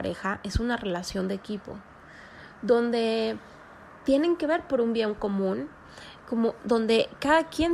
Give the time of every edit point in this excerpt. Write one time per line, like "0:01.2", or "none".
none